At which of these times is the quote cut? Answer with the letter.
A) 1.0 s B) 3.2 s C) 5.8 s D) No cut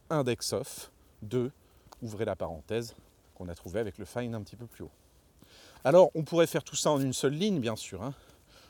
B